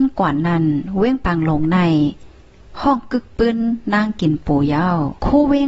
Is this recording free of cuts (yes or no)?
yes